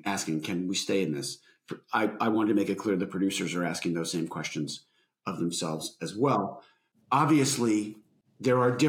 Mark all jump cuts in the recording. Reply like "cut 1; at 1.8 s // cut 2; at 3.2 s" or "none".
none